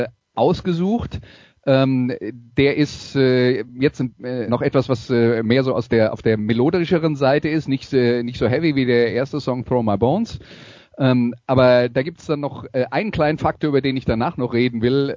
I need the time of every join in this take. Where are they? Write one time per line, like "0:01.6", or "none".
0:04.5

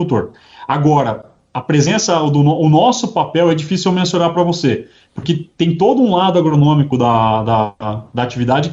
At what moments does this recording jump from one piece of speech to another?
none

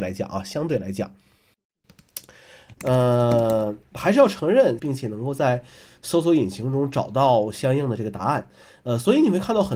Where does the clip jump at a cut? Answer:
0:02.8
0:04.8

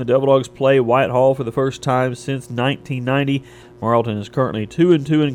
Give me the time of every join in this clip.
0:03.6

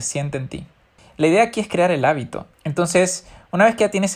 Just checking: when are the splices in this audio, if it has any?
0:01.0
0:02.5

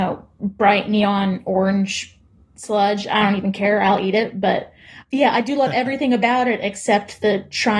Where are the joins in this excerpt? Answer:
none

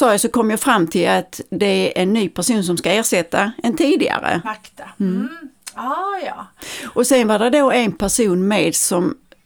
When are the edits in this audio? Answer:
0:04.4

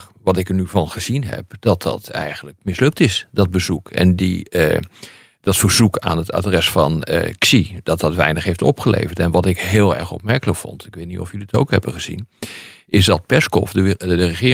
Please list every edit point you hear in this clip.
none

